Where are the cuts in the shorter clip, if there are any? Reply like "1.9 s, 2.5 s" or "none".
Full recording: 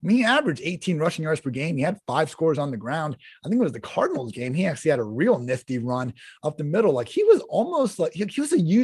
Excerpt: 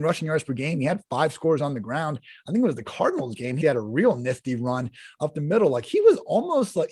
3.6 s

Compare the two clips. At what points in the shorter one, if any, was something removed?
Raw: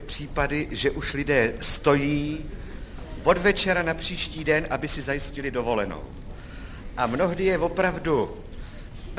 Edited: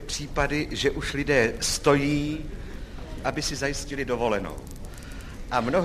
3.2 s

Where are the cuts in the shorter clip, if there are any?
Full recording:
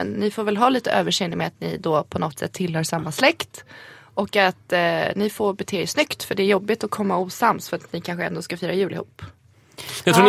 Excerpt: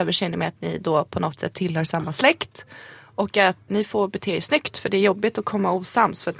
3.7 s

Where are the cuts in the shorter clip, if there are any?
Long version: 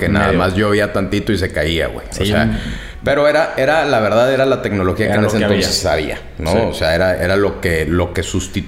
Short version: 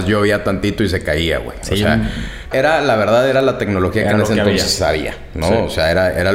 2.5 s

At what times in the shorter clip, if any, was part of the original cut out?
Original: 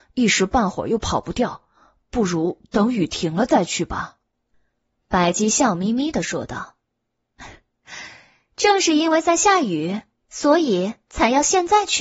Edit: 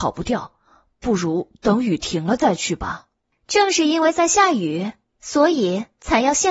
3.3 s

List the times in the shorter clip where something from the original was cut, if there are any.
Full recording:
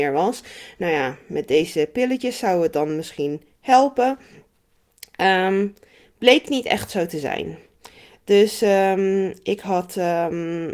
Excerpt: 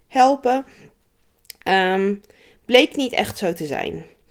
none

